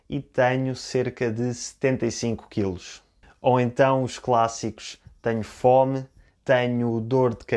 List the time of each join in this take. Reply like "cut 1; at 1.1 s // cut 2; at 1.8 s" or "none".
cut 1; at 6.3 s